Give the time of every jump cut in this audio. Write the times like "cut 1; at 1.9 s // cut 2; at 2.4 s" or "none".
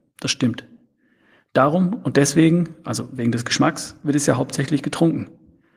none